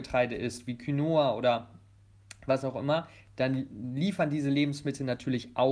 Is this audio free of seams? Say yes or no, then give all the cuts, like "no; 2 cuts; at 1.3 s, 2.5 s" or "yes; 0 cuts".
yes; 0 cuts